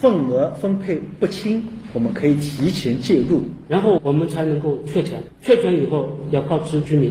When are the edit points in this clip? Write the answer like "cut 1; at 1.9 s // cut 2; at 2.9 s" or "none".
cut 1; at 3.7 s